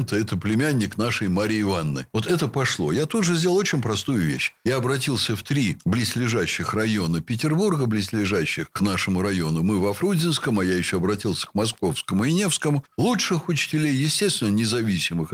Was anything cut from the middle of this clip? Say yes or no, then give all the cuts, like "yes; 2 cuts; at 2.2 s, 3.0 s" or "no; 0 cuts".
yes; 1 cut; at 12.9 s